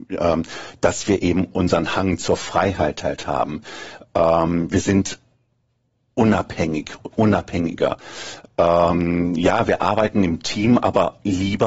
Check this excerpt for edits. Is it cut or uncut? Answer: uncut